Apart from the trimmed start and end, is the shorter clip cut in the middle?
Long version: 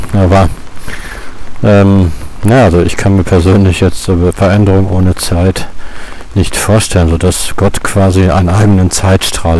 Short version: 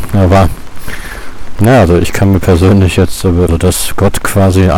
yes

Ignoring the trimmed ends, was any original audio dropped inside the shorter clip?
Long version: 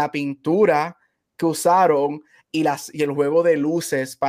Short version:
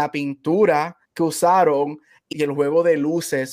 yes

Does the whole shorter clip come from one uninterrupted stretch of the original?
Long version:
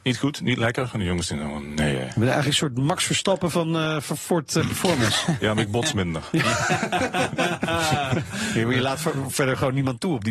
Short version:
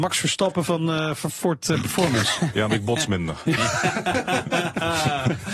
yes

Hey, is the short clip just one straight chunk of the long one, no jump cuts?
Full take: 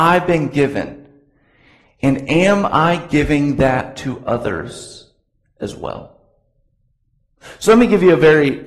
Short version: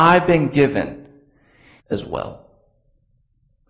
no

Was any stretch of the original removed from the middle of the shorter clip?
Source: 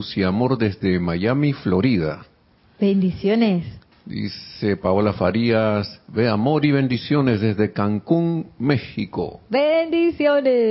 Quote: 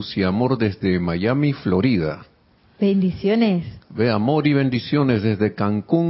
yes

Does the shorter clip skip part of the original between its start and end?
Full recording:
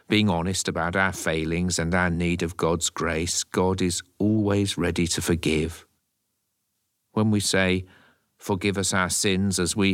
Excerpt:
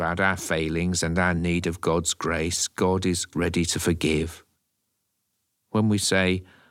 yes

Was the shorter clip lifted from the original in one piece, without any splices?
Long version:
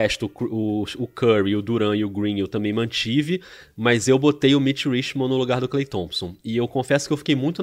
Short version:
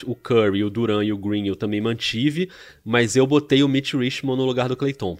yes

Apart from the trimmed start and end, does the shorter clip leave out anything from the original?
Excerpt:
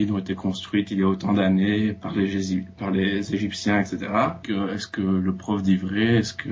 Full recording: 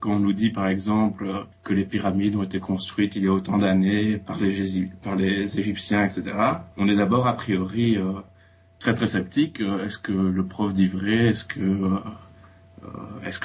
yes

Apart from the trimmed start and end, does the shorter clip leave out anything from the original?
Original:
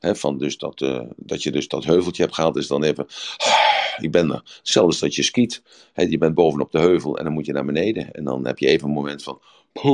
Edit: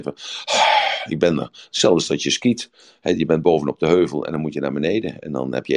no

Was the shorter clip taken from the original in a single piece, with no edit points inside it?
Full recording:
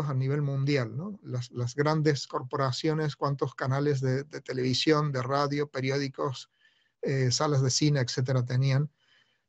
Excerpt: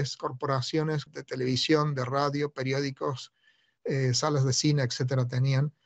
no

